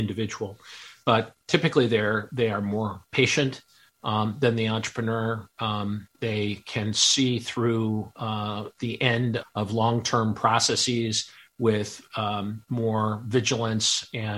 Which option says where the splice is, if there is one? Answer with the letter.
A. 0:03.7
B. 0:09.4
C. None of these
B